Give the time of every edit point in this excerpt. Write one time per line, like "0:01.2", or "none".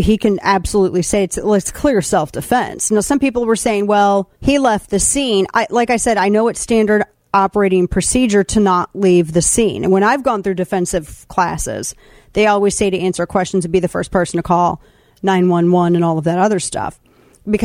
0:04.3